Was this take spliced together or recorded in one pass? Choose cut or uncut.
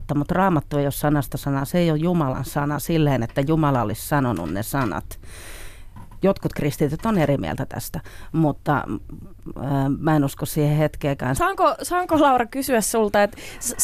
cut